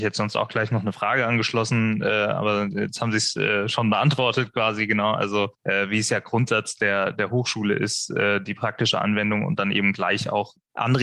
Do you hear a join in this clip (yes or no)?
no